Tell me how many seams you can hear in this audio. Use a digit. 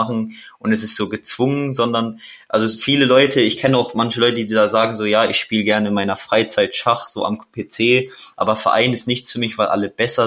0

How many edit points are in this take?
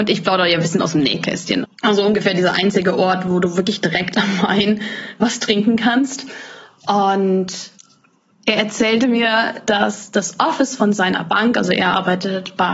1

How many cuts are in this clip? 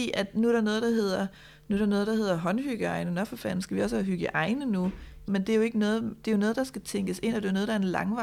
1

